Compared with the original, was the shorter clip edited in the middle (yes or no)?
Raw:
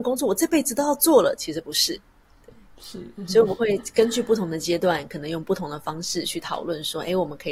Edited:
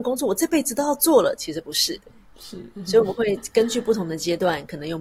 yes